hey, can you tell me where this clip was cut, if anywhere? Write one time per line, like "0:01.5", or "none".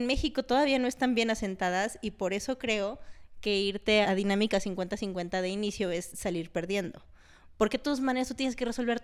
0:04.0